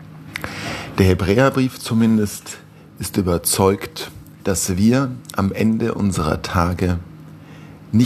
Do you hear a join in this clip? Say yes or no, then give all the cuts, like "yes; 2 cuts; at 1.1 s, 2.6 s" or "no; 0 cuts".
yes; 2 cuts; at 0.9 s, 4.4 s